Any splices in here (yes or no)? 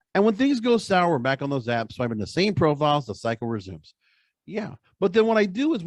no